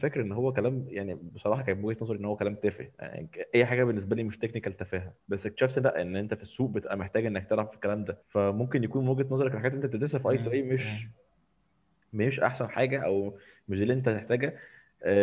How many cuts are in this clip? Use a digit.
2